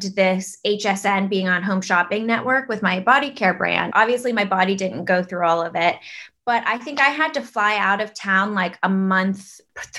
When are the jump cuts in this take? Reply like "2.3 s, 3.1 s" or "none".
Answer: 3.9 s